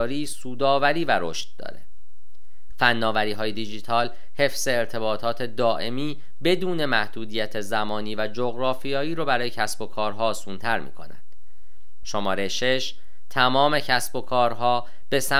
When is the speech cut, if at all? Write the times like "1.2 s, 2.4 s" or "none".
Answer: 2.7 s, 12.0 s